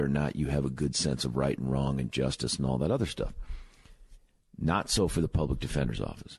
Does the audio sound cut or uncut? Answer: uncut